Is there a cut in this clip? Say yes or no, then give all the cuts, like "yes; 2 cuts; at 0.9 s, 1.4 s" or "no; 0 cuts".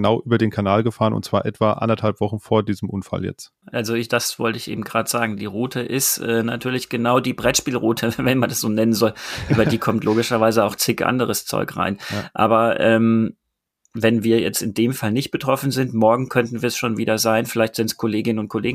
no; 0 cuts